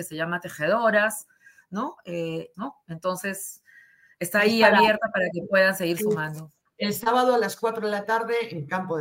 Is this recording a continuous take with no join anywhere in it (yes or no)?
no